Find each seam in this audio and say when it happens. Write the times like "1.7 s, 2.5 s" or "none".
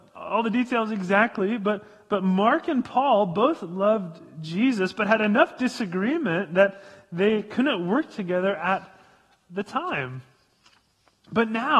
none